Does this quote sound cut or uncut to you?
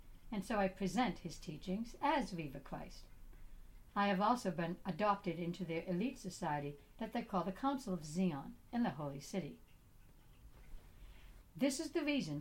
cut